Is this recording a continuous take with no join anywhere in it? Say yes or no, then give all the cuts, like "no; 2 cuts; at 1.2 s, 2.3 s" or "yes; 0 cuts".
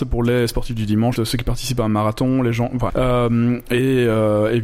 no; 2 cuts; at 1.2 s, 2.9 s